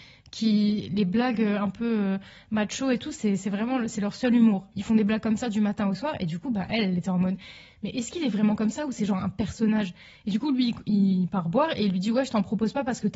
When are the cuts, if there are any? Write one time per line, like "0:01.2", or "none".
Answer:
0:04.7